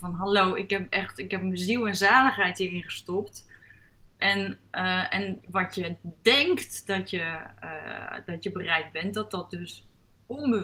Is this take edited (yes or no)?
yes